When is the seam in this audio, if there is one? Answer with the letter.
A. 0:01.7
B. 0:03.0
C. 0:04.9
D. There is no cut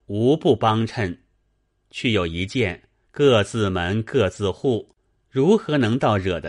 B